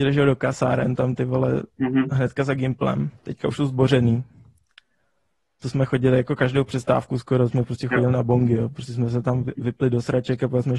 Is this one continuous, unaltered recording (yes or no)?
yes